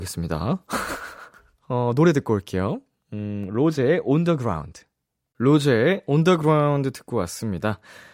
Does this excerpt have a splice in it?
no; 0 cuts

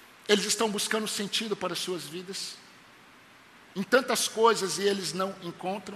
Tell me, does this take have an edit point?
no; 0 cuts

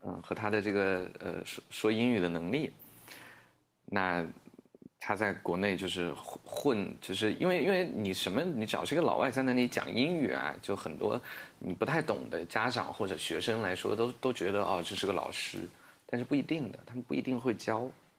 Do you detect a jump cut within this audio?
no; 0 cuts

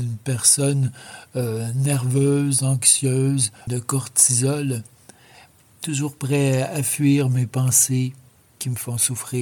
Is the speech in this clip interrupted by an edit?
yes; 1 cut; at 3.7 s

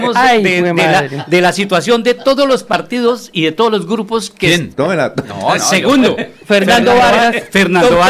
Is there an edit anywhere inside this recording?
yes; 1 cut; at 4.7 s

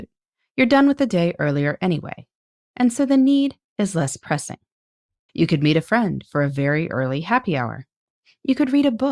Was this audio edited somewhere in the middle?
yes; 1 cut; at 5.3 s

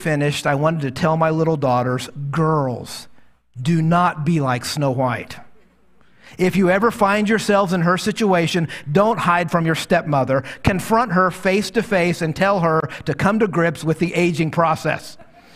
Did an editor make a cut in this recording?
no; 0 cuts

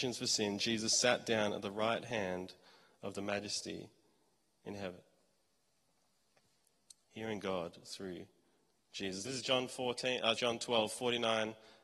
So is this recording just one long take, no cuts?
no; 2 cuts; at 9.2 s, 10.3 s

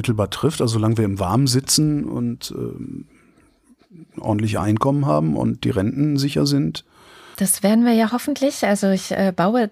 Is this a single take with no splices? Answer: yes; 0 cuts

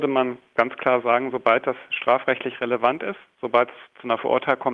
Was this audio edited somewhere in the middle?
no; 0 cuts

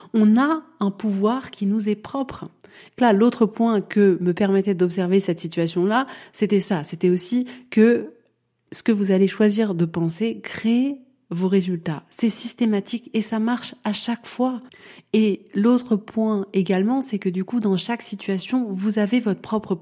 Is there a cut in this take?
yes; 1 cut; at 3.0 s

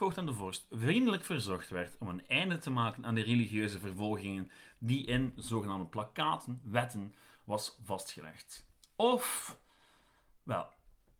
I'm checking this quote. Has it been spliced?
no; 0 cuts

